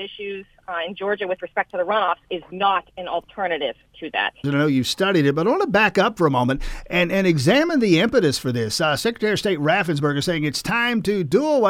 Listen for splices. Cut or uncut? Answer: cut